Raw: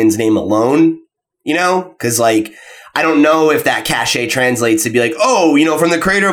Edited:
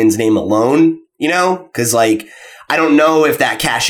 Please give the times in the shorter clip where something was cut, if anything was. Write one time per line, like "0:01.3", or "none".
0:01.1